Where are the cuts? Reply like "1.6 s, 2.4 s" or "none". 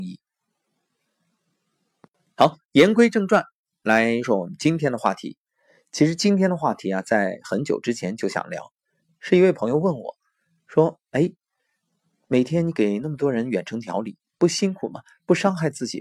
4.2 s, 14.2 s